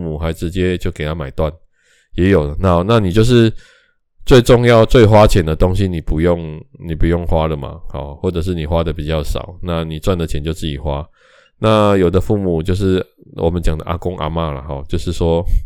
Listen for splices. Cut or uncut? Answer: uncut